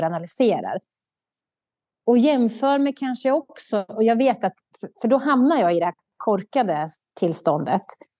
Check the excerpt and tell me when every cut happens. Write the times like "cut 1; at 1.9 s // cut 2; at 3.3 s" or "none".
none